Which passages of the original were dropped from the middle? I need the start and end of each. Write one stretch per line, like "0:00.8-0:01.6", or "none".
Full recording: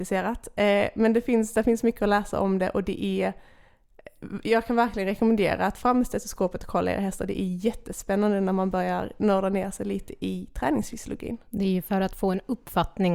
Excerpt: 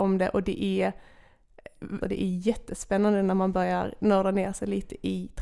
0:04.4-0:07.2